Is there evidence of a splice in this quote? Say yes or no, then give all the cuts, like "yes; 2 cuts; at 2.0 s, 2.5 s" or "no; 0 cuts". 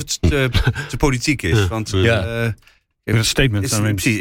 no; 0 cuts